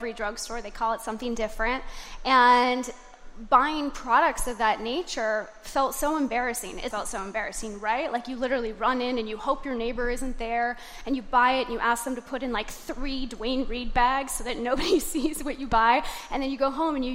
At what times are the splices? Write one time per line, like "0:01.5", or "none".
0:06.9